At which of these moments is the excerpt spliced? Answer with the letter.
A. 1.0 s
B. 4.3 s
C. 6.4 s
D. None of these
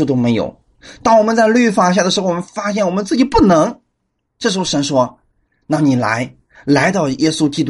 D